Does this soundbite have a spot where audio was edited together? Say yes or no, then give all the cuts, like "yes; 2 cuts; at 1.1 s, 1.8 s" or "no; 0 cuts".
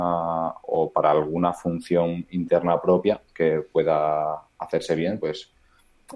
no; 0 cuts